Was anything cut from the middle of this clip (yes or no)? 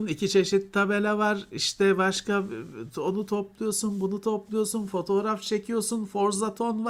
no